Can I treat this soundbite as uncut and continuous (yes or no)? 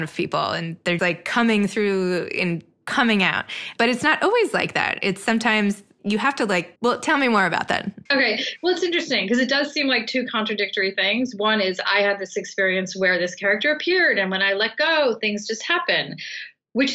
no